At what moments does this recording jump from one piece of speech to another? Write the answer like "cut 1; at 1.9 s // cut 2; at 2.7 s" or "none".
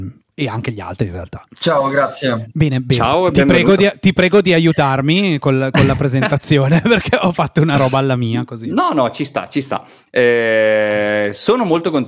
none